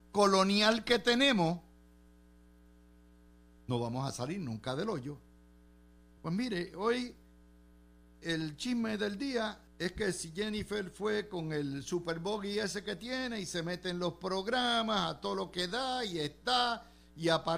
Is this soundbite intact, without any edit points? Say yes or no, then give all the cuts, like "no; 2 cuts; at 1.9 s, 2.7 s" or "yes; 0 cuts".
no; 2 cuts; at 6.2 s, 9.7 s